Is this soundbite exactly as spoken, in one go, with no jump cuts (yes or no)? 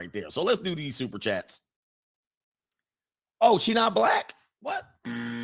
yes